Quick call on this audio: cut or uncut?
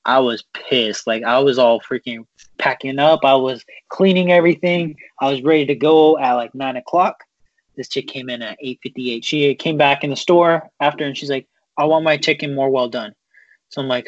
cut